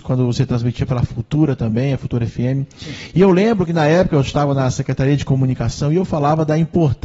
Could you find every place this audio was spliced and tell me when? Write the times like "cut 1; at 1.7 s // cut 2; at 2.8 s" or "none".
none